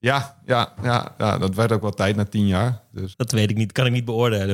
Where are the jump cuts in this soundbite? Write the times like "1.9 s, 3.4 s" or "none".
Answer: 3.1 s